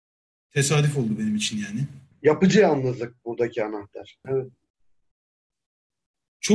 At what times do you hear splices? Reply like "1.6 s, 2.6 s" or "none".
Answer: 2.1 s, 4.2 s